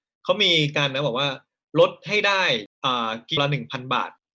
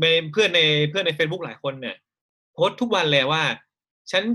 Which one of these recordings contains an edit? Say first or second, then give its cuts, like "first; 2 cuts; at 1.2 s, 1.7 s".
first; 1 cut; at 3.4 s